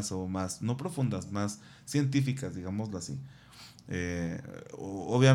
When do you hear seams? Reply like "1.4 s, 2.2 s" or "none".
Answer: none